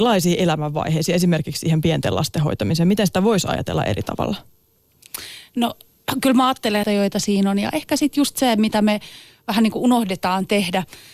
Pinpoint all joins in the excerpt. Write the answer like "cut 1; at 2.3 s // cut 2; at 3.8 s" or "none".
cut 1; at 6.8 s